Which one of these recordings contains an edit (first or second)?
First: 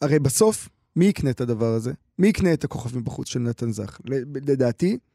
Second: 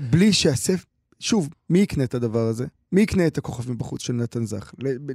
second